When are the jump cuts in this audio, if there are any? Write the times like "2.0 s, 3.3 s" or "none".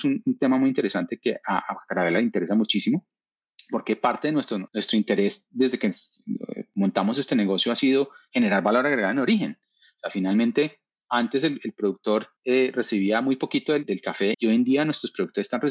12.4 s, 14.3 s